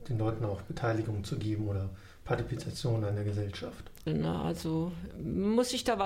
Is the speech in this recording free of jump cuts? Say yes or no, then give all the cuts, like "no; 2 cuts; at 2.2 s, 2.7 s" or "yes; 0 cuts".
no; 1 cut; at 4.1 s